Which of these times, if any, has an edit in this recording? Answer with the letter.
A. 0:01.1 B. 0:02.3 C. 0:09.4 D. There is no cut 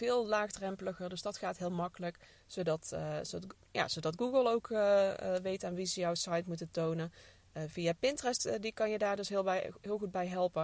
B